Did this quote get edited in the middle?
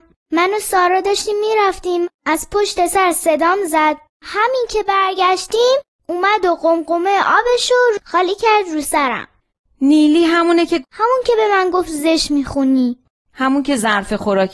no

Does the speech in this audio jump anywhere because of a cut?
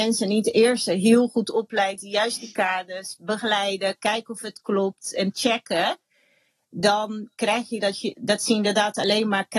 no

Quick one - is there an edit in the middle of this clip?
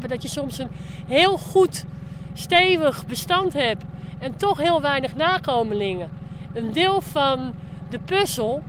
yes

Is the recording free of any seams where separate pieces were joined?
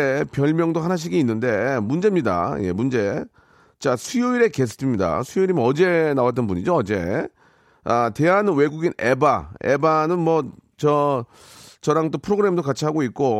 yes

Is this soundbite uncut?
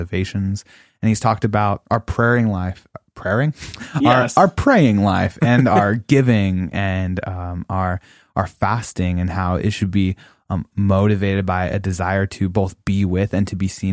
no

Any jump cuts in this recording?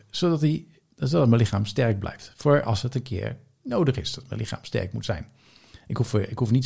no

